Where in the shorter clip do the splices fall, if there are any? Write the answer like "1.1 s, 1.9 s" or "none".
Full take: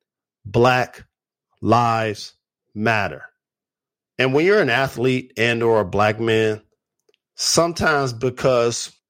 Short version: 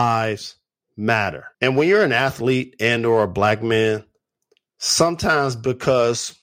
1.5 s